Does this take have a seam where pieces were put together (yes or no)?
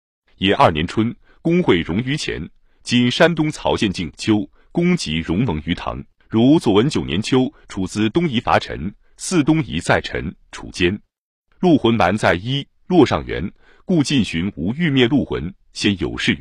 yes